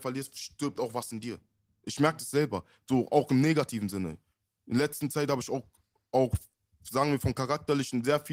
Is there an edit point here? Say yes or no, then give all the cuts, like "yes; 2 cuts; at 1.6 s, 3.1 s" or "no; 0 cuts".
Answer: no; 0 cuts